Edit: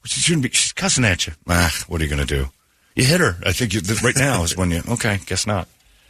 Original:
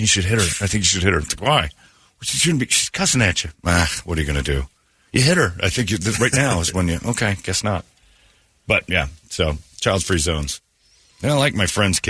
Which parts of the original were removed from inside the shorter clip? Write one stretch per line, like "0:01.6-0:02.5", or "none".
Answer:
none